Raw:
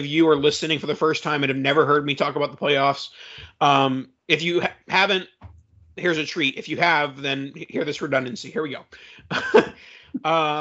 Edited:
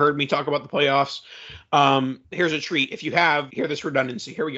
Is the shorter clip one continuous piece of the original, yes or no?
no